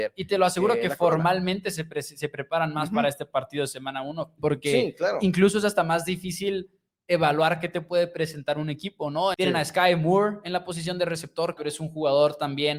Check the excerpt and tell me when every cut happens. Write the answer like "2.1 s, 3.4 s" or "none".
4.4 s, 9.3 s, 11.6 s